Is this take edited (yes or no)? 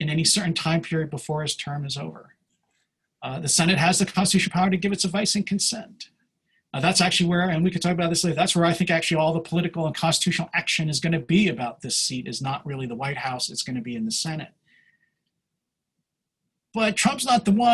no